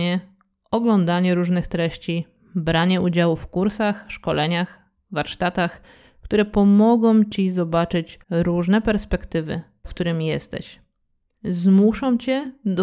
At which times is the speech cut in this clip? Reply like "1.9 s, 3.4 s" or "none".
8.2 s, 9.8 s